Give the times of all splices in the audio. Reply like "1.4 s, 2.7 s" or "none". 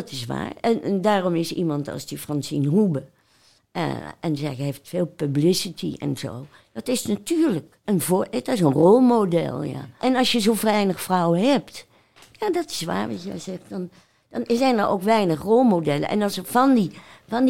7.8 s, 10.0 s